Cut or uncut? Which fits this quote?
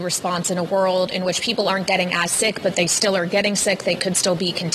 uncut